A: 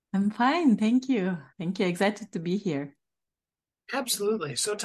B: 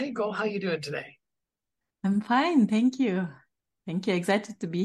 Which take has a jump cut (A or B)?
A